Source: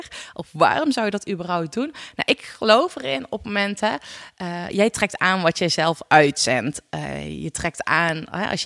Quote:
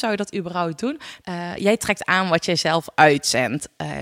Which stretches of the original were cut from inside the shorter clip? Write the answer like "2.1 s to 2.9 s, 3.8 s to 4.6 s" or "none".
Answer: 2.2 s to 4.3 s